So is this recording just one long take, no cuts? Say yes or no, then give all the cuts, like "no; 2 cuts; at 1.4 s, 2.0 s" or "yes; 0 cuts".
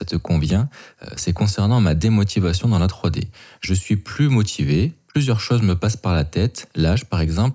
yes; 0 cuts